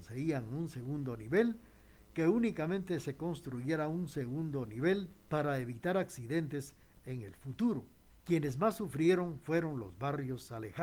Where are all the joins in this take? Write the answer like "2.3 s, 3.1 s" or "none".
5.2 s, 8.1 s